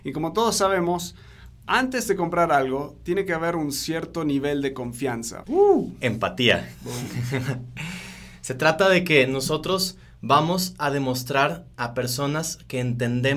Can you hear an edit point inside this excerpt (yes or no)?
yes